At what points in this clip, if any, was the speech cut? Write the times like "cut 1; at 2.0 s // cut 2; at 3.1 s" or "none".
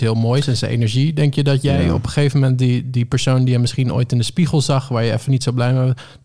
none